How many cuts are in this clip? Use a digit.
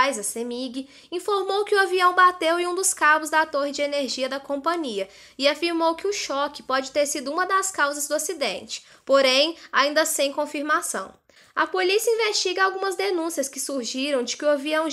0